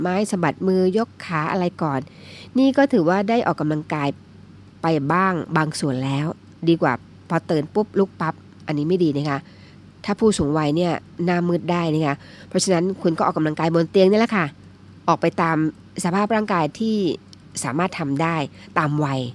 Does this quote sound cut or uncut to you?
uncut